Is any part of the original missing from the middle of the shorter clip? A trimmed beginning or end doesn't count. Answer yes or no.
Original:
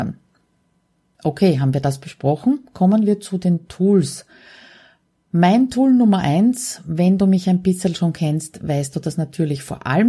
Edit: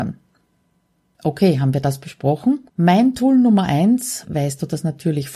yes